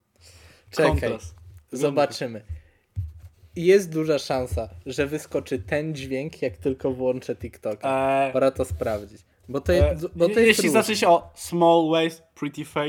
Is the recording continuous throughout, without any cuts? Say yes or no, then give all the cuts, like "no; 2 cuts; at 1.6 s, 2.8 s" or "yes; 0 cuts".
yes; 0 cuts